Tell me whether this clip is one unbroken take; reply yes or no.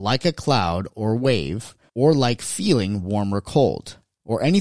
yes